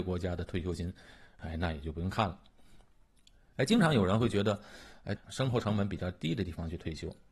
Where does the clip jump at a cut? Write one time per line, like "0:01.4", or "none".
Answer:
0:03.5
0:05.2